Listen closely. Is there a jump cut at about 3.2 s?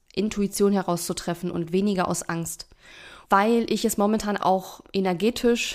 yes; 2 cuts; at 3.2 s, 4.4 s

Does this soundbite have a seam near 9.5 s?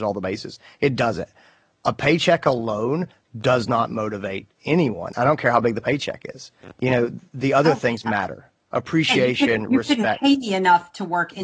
no; 0 cuts

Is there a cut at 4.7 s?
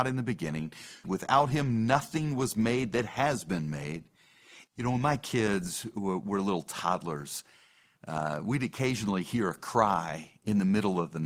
yes; 2 cuts; at 1.0 s, 4.7 s

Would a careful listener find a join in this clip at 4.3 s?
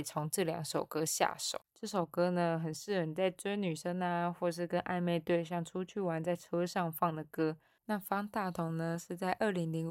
no; 2 cuts; at 1.6 s, 7.8 s

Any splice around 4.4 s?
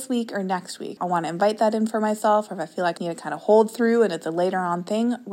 no; 2 cuts; at 1.0 s, 3.0 s

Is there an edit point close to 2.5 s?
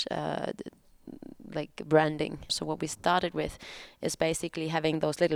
yes; 1 cut; at 2.5 s

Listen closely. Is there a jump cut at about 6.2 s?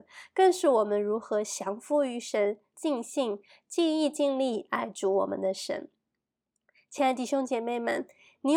no; 1 cut; at 2.7 s

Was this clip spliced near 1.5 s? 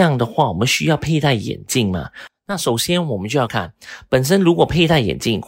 no; 1 cut; at 3.5 s

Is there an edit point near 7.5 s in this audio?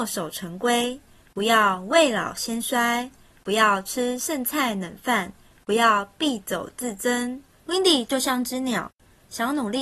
yes; 1 cut; at 7.5 s

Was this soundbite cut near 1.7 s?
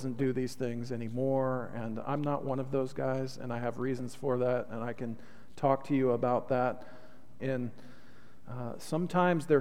no; 1 cut; at 7.4 s

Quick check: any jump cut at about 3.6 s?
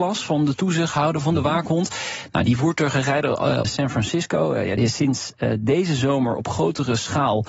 yes; 2 cuts; at 3.6 s, 4.8 s

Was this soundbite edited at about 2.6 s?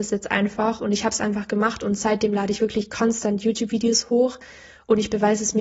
no; 0 cuts

